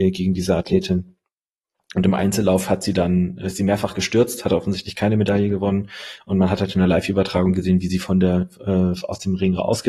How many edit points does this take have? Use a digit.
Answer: 0